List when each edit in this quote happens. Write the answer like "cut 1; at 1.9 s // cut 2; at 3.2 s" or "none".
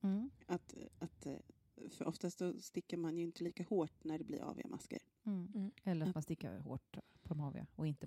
cut 1; at 5.8 s